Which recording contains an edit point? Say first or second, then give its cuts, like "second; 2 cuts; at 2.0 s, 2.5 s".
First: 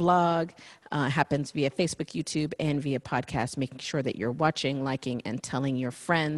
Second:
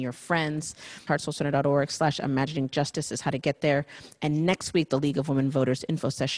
second; 1 cut; at 1.1 s